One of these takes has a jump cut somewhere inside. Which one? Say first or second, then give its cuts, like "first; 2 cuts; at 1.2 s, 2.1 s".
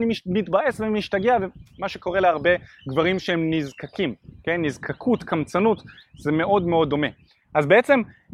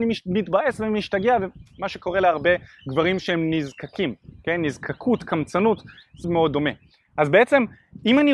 second; 1 cut; at 6.2 s